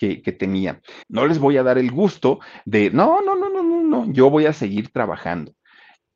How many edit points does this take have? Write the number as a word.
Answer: two